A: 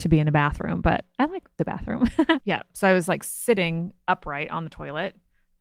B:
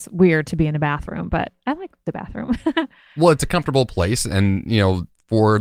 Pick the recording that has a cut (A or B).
A